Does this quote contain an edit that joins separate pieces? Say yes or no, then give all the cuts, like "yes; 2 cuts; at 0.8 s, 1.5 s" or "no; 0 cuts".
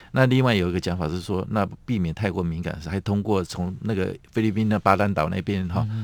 no; 0 cuts